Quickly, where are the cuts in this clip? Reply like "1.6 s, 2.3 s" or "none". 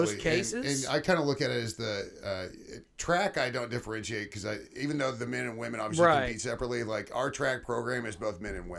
none